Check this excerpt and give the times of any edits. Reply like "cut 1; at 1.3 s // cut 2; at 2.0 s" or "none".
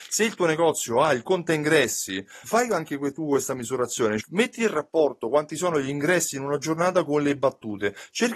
cut 1; at 2.4 s // cut 2; at 4.2 s